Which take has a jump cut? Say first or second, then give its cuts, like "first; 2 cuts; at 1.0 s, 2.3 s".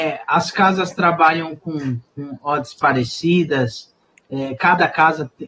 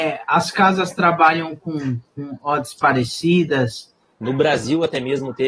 second; 1 cut; at 4.1 s